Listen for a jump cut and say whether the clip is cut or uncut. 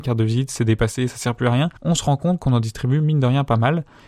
cut